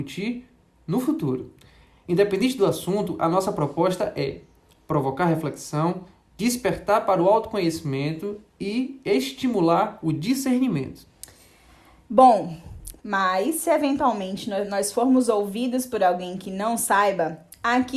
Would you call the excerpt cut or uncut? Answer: cut